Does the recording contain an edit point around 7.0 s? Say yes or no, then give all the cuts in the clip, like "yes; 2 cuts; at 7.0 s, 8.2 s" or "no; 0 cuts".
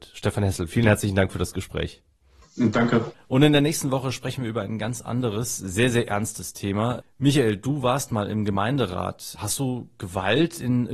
yes; 2 cuts; at 3.1 s, 7.0 s